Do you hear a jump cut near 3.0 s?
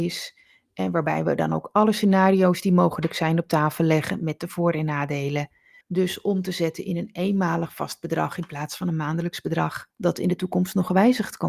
no; 2 cuts; at 5.8 s, 9.9 s

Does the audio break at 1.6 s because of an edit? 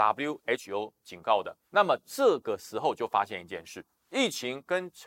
no; 0 cuts

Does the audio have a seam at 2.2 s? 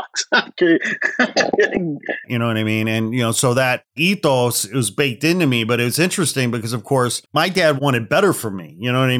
yes; 2 cuts; at 2.2 s, 7.3 s

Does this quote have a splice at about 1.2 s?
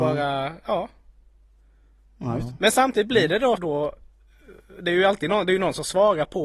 no; 1 cut; at 3.6 s

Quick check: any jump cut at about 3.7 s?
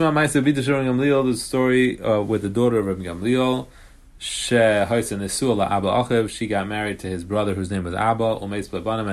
no; 0 cuts

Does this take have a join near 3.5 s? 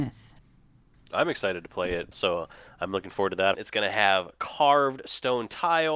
yes; 2 cuts; at 2.1 s, 3.5 s

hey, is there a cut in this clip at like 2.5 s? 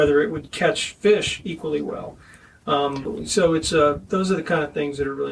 no; 0 cuts

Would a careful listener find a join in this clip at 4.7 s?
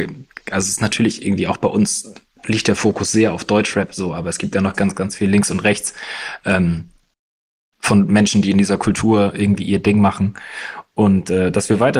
yes; 1 cut; at 4.7 s

